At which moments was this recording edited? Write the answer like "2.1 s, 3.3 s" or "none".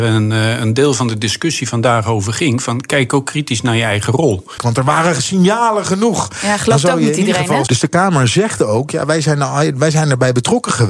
4.6 s, 7.7 s